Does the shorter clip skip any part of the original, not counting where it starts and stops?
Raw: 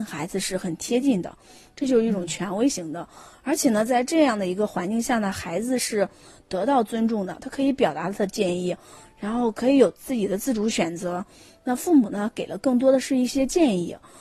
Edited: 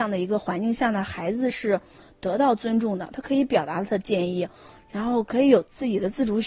no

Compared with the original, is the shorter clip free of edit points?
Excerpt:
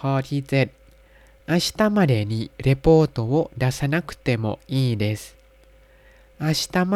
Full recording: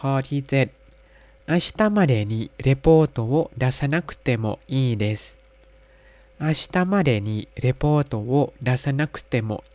yes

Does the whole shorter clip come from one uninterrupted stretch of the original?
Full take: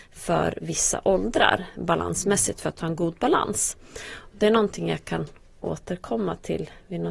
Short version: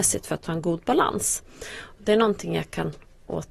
yes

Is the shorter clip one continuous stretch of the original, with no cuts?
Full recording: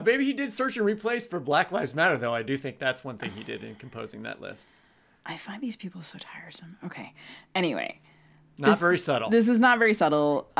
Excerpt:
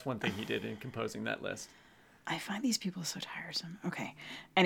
yes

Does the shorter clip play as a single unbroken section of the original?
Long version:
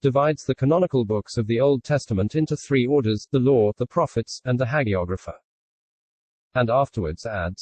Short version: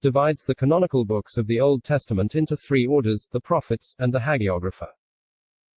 no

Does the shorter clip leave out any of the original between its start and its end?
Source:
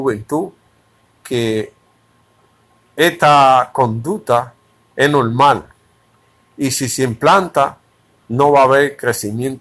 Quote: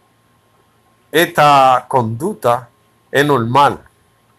no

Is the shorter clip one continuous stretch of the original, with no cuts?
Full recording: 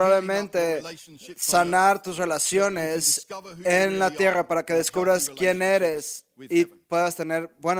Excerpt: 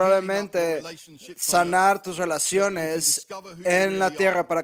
yes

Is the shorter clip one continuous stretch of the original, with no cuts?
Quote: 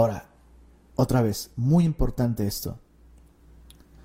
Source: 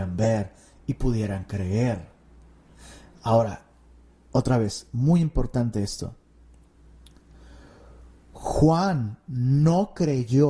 yes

